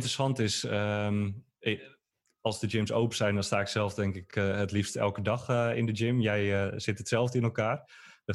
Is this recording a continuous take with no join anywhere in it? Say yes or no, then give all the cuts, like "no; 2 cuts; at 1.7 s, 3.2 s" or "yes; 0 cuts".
yes; 0 cuts